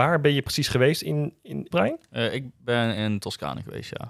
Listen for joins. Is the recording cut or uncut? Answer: cut